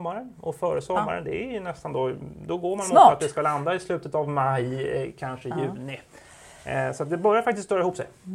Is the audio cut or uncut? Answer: uncut